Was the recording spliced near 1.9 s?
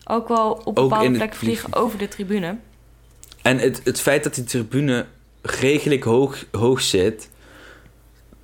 no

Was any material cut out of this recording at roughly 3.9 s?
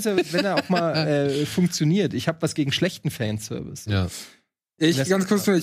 no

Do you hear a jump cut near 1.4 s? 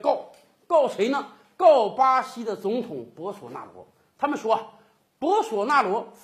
no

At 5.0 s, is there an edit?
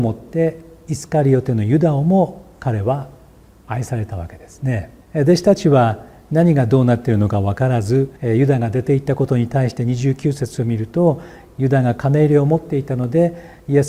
yes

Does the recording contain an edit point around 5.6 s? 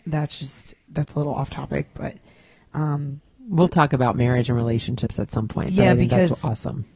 no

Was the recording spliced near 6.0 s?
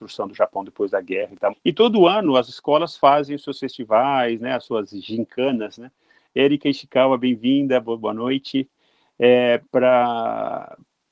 no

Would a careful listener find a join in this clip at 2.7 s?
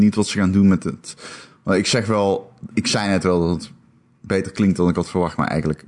yes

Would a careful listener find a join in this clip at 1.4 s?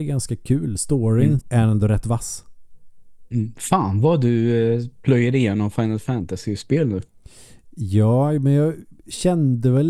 yes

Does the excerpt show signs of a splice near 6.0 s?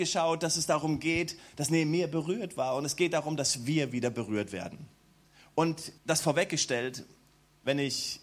yes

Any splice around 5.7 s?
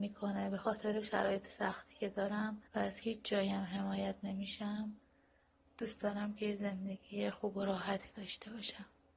no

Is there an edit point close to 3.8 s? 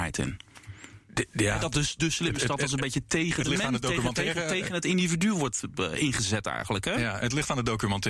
no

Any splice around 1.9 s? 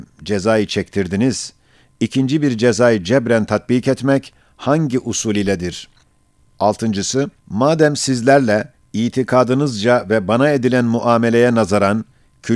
no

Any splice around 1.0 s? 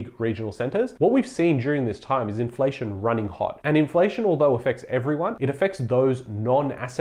yes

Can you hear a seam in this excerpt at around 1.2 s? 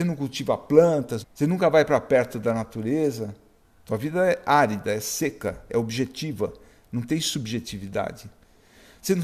yes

